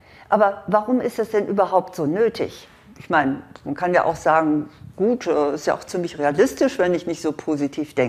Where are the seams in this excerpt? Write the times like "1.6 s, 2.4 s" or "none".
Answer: none